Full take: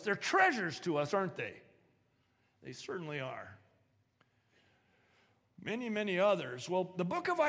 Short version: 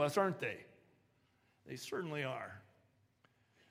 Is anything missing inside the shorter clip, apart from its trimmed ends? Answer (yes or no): no